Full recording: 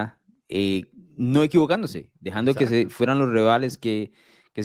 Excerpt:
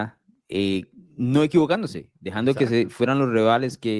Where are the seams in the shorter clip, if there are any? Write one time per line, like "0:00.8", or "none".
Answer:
none